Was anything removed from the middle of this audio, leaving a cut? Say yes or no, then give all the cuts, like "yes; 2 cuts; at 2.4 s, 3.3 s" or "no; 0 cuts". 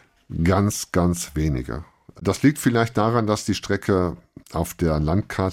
yes; 1 cut; at 4.4 s